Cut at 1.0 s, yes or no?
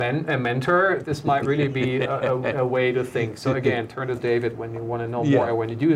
yes